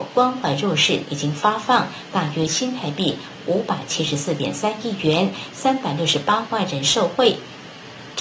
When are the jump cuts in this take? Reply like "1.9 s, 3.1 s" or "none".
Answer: 1.0 s